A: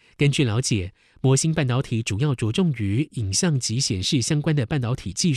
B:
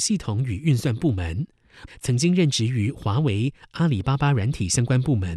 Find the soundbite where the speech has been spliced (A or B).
B